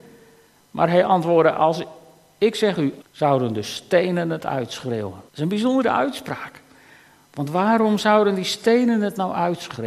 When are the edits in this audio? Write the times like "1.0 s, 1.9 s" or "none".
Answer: 3.0 s, 5.3 s